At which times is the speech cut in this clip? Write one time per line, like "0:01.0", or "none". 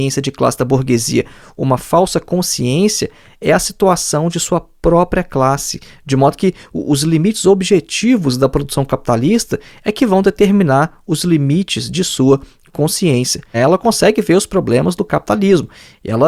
0:13.5